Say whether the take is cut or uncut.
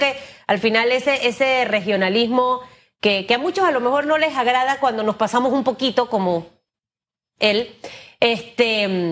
uncut